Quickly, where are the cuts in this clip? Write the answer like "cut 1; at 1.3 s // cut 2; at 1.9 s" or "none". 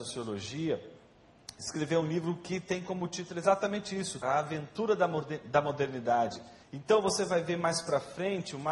cut 1; at 4.2 s // cut 2; at 6.6 s